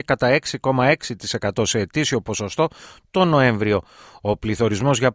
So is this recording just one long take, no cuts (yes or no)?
yes